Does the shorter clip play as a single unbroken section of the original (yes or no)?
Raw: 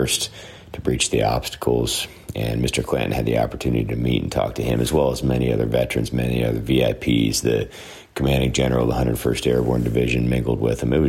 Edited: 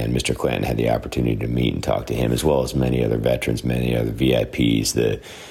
yes